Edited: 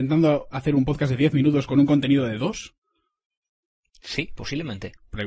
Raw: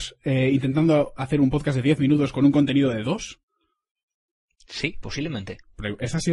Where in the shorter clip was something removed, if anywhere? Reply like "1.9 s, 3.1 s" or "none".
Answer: none